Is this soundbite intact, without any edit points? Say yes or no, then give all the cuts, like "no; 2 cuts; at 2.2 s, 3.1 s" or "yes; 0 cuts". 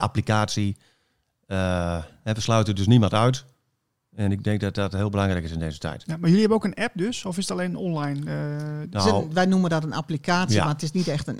yes; 0 cuts